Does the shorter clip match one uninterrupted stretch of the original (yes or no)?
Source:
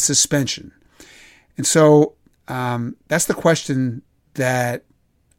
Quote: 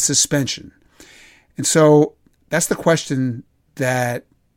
no